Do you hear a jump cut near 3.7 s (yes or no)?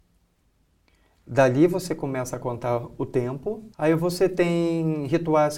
yes